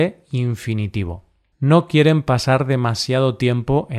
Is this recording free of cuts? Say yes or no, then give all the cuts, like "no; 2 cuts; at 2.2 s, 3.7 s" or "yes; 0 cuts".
no; 1 cut; at 1.5 s